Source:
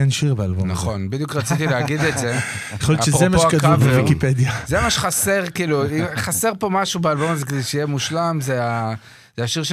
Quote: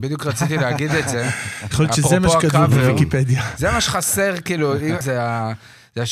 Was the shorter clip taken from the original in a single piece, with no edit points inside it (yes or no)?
no